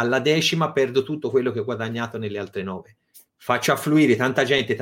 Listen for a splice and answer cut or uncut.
cut